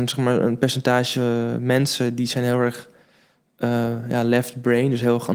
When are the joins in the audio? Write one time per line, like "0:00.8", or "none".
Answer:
none